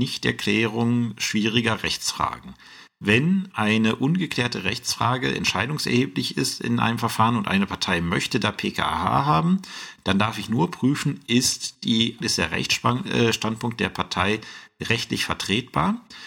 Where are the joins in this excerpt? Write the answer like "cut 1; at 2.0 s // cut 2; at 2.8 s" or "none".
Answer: cut 1; at 12.2 s